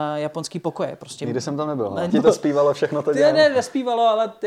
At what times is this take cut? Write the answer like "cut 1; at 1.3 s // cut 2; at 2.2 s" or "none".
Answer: cut 1; at 2.1 s